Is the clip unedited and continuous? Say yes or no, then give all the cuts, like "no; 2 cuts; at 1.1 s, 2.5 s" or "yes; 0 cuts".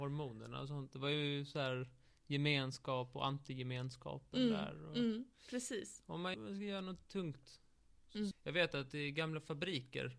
no; 2 cuts; at 6.3 s, 8.3 s